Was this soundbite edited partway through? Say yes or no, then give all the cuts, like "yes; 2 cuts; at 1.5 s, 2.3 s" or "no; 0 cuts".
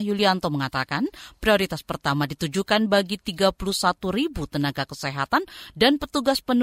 no; 0 cuts